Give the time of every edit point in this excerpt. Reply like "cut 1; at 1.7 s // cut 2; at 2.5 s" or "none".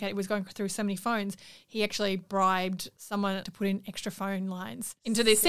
cut 1; at 3.4 s

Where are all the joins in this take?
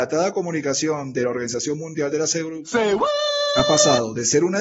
none

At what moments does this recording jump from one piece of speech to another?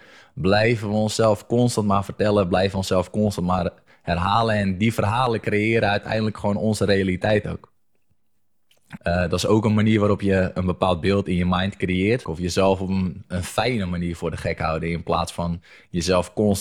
cut 1; at 9.0 s // cut 2; at 12.2 s

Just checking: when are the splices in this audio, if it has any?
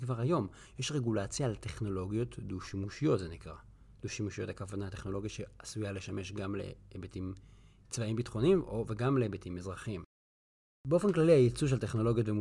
none

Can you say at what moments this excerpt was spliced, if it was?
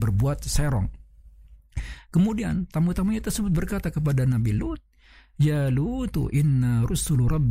none

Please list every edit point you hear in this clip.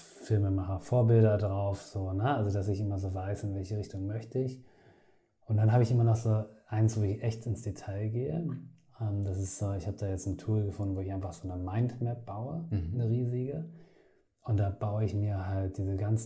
none

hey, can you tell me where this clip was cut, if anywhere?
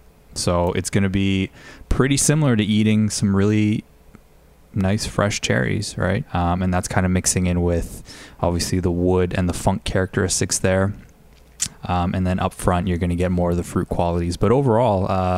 cut 1; at 6.2 s // cut 2; at 11.7 s

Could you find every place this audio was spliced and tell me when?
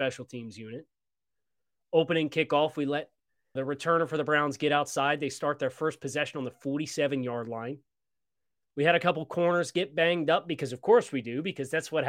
cut 1; at 3.6 s

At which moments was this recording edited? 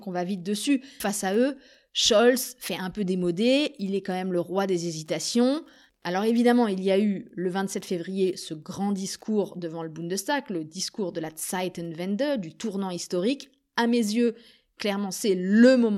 none

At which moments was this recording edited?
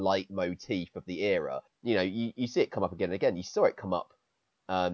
cut 1; at 1.7 s

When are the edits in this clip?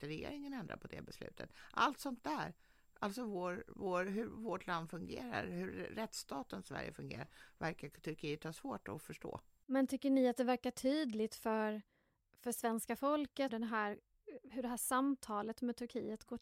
cut 1; at 13.5 s

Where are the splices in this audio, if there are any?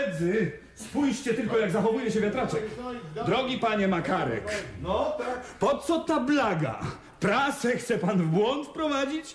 none

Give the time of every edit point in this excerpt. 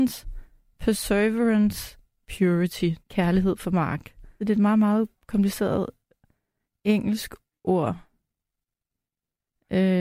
cut 1; at 3.0 s // cut 2; at 4.4 s

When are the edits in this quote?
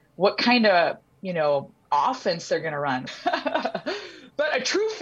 cut 1; at 3.1 s

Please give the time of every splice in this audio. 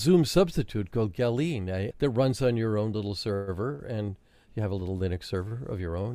cut 1; at 1.9 s

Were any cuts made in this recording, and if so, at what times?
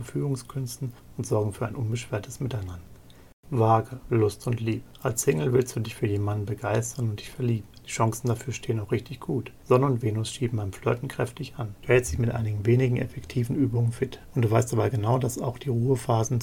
cut 1; at 3.3 s // cut 2; at 11.8 s

